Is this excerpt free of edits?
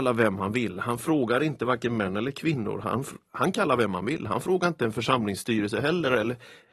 yes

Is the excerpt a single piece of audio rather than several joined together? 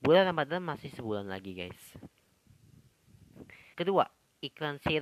no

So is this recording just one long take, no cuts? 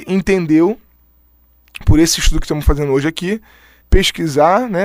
no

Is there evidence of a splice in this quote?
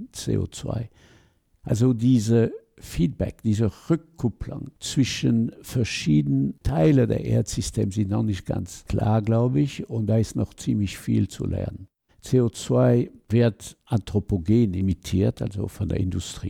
yes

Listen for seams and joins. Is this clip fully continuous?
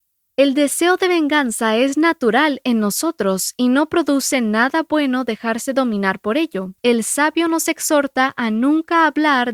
no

